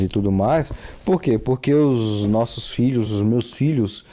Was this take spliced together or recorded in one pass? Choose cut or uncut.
uncut